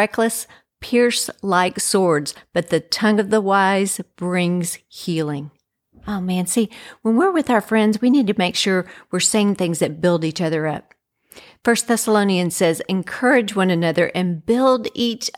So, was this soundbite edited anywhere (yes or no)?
no